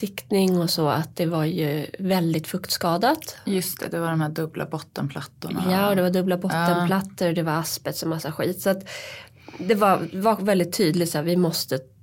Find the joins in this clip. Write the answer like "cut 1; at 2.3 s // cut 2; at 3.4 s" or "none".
none